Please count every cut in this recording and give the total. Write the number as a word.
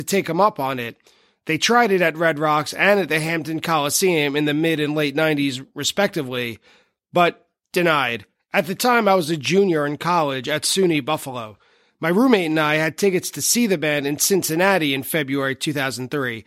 one